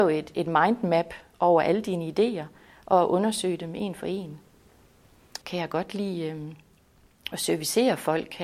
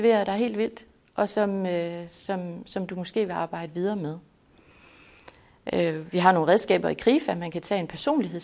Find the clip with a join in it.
first; 1 cut; at 5.4 s

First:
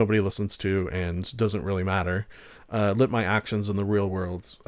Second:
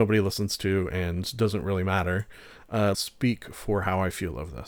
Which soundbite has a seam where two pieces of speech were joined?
second; 1 cut; at 2.9 s

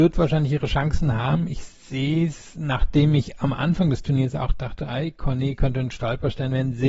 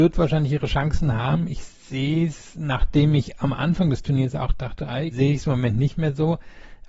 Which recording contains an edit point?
second; 1 cut; at 5.1 s

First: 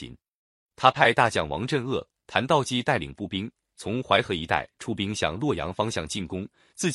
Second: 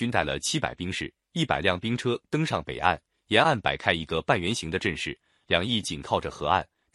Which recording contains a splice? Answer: second; 1 cut; at 5.8 s

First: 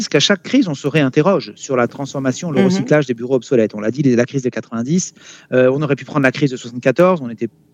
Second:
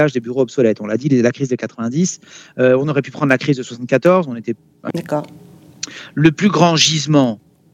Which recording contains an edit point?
second; 1 cut; at 4.9 s

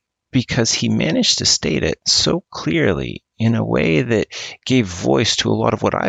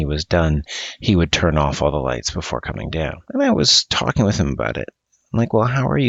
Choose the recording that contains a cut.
second; 1 cut; at 3.3 s

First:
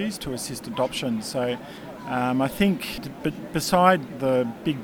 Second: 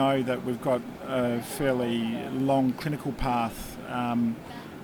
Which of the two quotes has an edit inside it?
first; 1 cut; at 3.0 s

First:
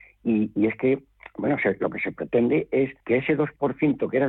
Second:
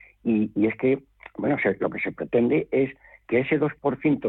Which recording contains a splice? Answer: first; 1 cut; at 3.0 s

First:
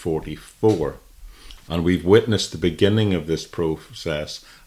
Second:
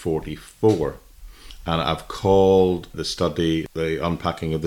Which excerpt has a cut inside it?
first; 1 cut; at 1.6 s

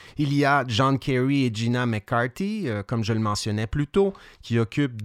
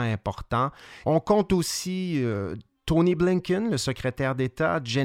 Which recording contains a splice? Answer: second; 1 cut; at 1.0 s

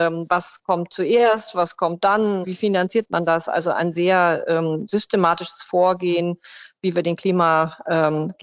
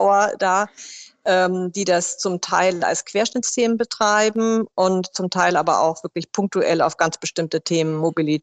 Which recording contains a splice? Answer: first; 1 cut; at 2.4 s

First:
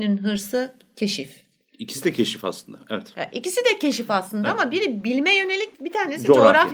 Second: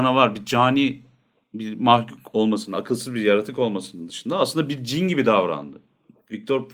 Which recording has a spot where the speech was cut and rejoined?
first; 1 cut; at 5.7 s

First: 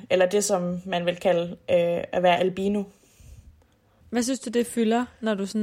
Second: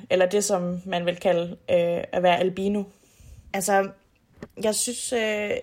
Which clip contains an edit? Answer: second; 1 cut; at 3.5 s

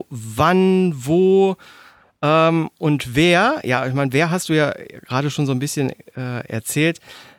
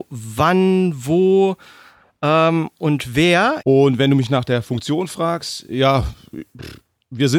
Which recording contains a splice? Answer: second; 1 cut; at 3.6 s

